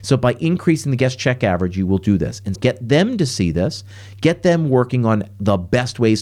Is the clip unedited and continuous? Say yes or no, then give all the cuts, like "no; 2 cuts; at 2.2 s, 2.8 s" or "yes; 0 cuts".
no; 1 cut; at 2.5 s